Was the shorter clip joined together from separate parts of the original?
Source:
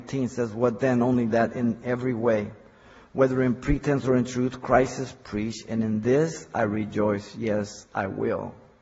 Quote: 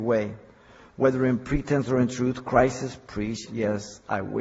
yes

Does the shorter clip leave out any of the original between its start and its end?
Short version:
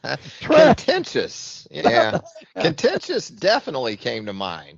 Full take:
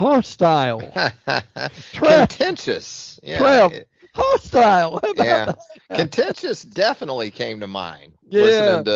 yes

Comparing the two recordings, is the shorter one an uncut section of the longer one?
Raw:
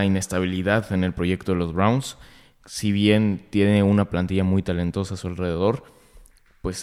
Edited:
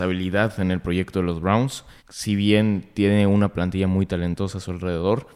no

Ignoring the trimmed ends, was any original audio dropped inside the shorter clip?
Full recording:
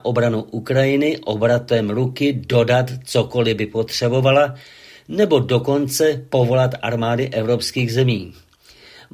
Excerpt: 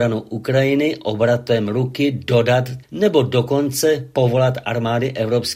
yes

